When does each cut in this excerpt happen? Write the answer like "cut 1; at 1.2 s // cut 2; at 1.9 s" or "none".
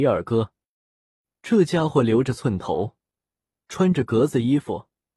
none